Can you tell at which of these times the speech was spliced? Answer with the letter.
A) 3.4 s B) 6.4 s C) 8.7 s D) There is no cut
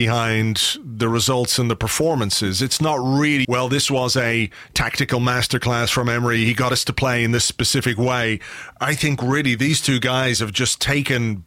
A